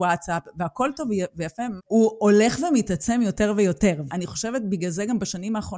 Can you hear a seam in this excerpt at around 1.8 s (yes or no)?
yes